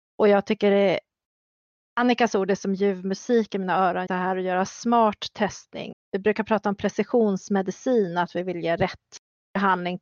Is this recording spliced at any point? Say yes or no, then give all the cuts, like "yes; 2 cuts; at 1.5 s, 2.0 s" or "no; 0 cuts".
yes; 2 cuts; at 4.1 s, 5.9 s